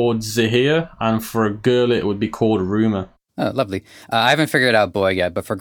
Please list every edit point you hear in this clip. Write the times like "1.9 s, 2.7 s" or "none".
none